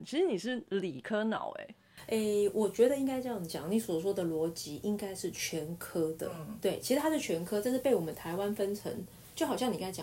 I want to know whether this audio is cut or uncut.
uncut